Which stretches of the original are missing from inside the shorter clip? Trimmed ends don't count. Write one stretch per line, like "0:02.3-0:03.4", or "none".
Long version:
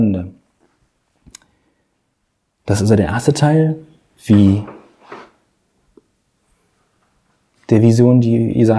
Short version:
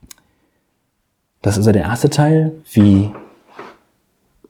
0:03.9-0:04.2